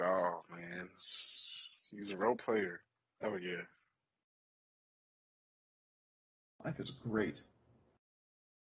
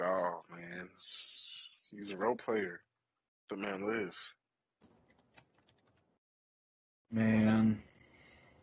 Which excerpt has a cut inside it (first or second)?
first